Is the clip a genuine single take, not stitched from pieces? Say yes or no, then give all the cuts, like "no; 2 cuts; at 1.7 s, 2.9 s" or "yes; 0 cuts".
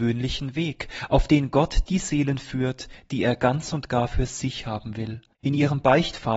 no; 1 cut; at 5.3 s